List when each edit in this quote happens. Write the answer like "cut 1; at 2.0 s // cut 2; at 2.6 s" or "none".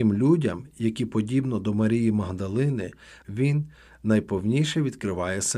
cut 1; at 3.2 s